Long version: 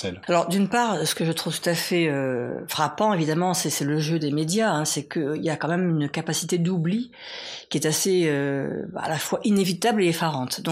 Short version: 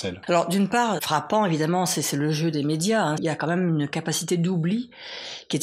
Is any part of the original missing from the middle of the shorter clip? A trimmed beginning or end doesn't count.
yes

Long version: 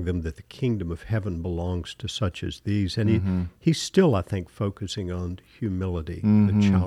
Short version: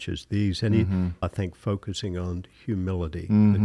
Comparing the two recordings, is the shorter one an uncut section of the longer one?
no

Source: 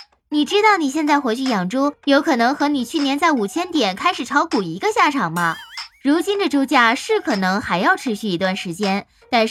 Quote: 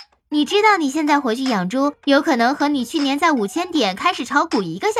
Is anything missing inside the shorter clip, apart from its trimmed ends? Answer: no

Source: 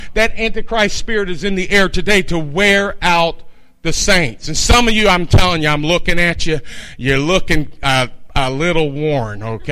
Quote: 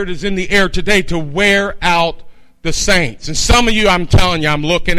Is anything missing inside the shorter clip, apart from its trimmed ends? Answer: no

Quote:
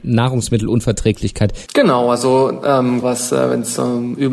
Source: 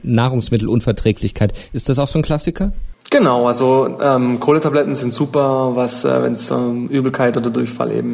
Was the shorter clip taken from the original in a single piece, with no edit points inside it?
no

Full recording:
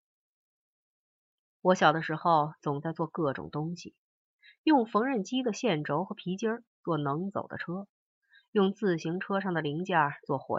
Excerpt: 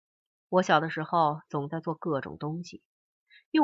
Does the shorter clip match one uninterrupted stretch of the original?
yes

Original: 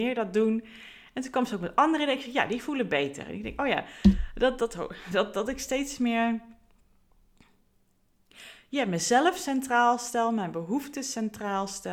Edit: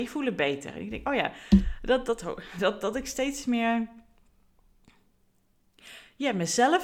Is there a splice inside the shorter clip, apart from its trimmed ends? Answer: no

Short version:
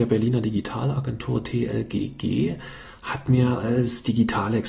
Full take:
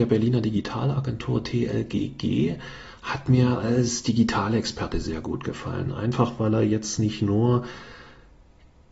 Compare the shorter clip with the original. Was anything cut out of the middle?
no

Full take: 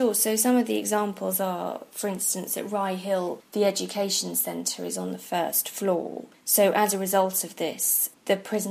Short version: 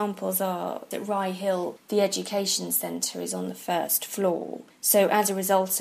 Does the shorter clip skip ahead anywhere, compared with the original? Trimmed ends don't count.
yes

